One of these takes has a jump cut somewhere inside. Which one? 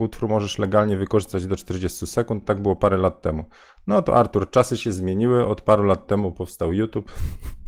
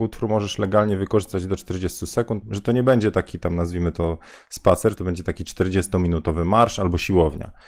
second; 2 cuts; at 2.4 s, 5.0 s

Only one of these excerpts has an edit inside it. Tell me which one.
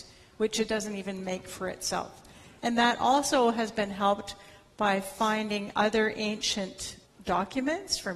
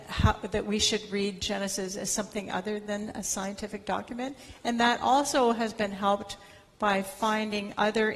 first; 2 cuts; at 2.6 s, 7.1 s

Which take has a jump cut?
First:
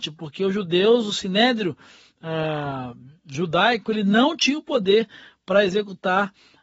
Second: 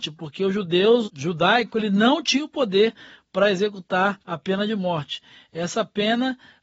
second; 2 cuts; at 1.0 s, 4.2 s

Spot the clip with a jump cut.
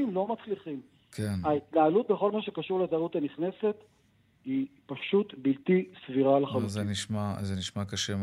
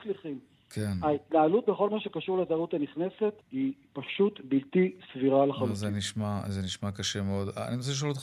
second; 1 cut; at 3.4 s

